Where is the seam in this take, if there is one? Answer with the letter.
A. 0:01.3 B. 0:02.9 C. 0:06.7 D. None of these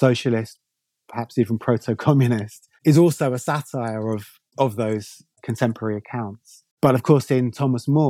C